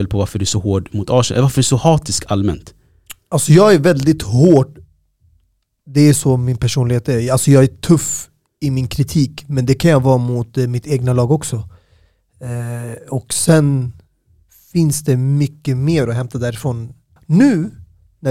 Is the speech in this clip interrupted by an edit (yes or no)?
yes